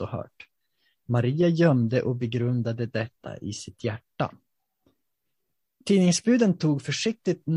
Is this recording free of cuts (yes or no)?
yes